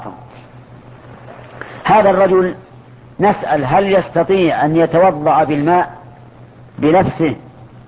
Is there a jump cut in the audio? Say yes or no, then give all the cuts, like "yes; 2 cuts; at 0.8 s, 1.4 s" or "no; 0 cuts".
no; 0 cuts